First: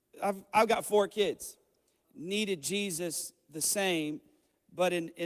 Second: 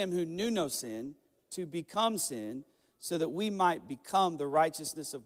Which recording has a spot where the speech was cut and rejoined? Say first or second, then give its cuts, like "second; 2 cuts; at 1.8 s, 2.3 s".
first; 1 cut; at 2.0 s